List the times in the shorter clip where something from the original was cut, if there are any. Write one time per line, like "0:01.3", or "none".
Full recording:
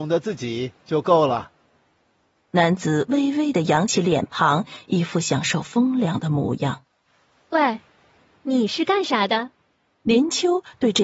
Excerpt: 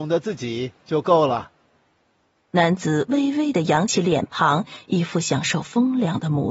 none